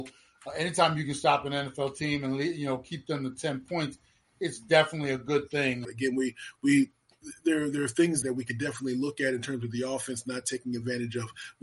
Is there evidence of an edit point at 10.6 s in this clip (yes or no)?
no